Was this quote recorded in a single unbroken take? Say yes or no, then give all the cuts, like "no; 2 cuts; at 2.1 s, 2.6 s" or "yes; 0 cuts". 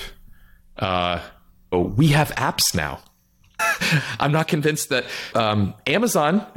no; 3 cuts; at 1.7 s, 3.6 s, 5.3 s